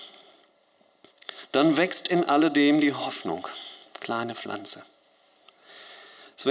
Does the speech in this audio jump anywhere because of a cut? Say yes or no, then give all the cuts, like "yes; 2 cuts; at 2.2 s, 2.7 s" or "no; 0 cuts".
yes; 1 cut; at 3.8 s